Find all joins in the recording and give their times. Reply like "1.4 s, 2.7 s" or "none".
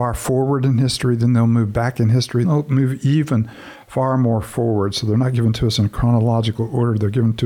2.4 s